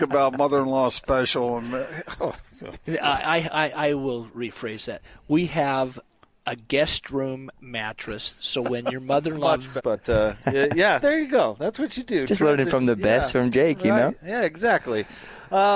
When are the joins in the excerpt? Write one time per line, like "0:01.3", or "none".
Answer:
0:09.8
0:11.0